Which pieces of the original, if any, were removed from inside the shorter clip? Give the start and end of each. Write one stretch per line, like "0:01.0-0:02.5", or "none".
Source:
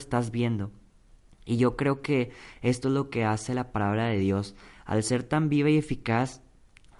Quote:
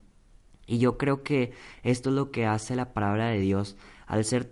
none